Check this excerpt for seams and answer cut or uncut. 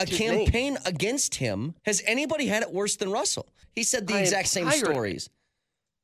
cut